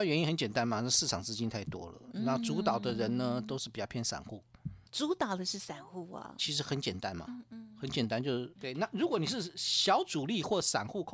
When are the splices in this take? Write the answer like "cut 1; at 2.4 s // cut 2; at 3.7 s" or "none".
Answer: cut 1; at 4.9 s // cut 2; at 6.4 s // cut 3; at 8.6 s